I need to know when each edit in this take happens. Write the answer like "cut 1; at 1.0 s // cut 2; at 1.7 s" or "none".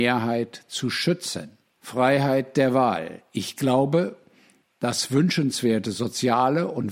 cut 1; at 1.8 s